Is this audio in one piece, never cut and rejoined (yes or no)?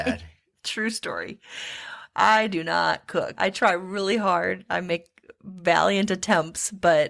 no